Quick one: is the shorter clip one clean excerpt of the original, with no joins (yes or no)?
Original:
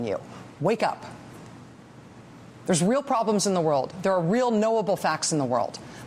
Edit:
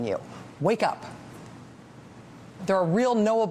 no